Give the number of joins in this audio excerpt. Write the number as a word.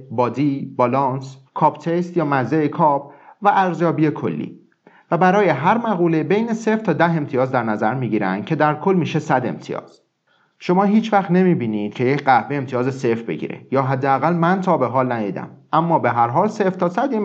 one